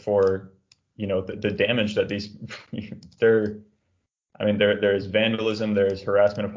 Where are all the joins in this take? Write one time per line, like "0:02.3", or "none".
none